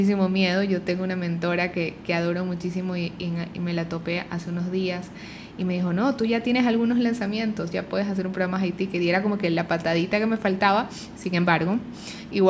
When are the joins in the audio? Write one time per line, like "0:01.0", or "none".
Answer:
none

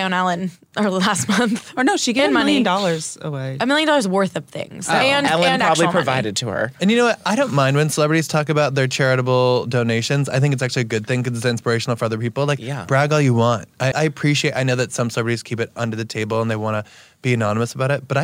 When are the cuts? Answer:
0:13.9

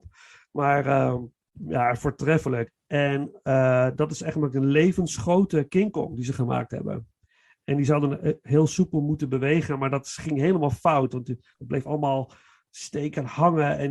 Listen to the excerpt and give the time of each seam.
0:02.7

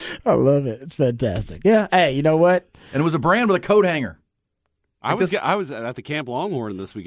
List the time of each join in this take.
none

